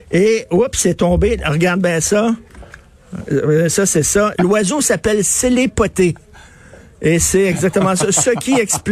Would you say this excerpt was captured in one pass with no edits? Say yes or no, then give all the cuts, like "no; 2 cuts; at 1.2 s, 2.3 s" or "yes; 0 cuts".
no; 1 cut; at 4.3 s